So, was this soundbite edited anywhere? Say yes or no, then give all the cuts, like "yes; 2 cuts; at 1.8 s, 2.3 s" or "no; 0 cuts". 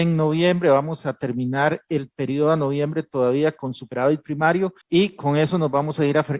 yes; 1 cut; at 4.8 s